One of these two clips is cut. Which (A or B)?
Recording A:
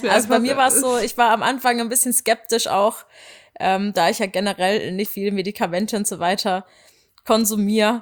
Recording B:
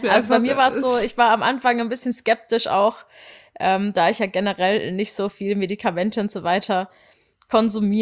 A